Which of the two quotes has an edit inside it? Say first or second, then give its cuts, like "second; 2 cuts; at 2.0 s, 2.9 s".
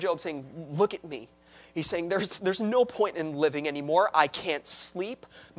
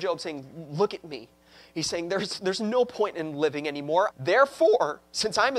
second; 1 cut; at 4.1 s